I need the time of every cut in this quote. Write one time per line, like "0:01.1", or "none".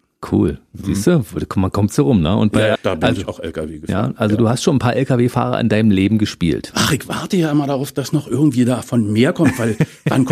0:02.8

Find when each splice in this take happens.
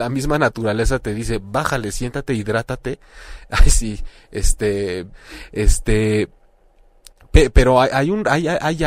0:05.1

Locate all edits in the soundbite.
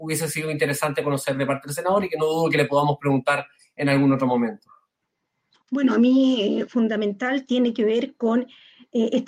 0:05.5
0:06.7

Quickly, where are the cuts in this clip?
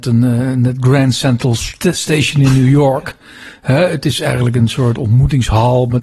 none

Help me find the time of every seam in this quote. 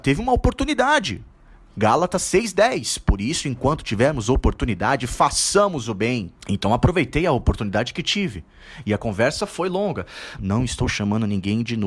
0:06.4
0:10.4

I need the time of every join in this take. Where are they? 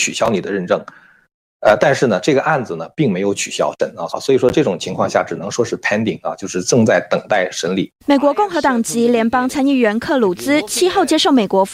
0:04.1

